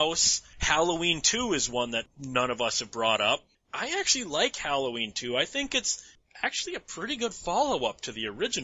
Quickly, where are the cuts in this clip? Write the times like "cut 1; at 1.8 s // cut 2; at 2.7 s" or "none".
none